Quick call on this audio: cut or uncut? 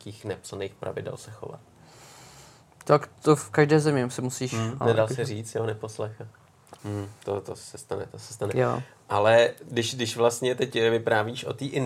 cut